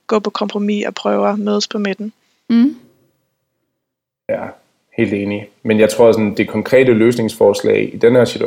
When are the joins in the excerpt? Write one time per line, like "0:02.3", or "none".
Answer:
none